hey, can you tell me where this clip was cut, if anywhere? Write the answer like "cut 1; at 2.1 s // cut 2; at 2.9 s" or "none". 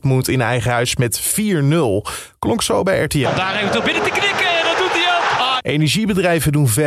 cut 1; at 3.2 s // cut 2; at 5.6 s